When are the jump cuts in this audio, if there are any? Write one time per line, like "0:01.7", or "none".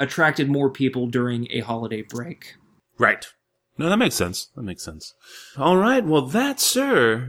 0:05.5